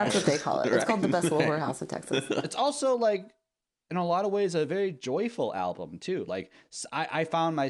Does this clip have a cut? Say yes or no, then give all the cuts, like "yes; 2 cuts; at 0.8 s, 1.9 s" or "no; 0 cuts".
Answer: no; 0 cuts